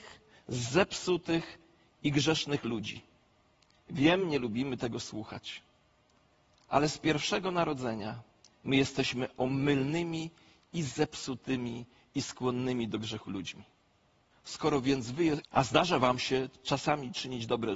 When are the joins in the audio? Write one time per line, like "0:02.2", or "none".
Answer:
0:14.3
0:15.4